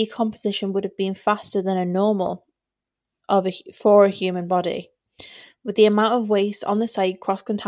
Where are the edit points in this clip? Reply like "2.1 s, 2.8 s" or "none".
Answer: none